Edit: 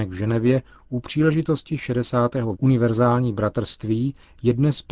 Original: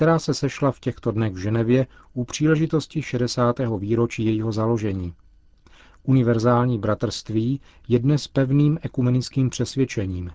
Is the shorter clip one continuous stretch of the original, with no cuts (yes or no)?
no